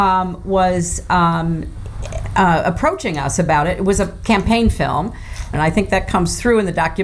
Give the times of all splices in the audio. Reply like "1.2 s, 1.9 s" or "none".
5.5 s